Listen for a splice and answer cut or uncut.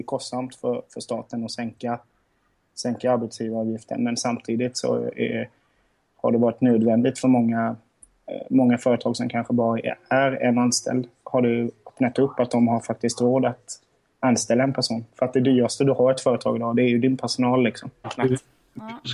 cut